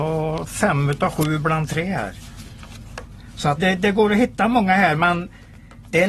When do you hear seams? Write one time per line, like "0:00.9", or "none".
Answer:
0:03.6